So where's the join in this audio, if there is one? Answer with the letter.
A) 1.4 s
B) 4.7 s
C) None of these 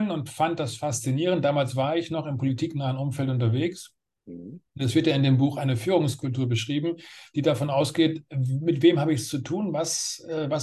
C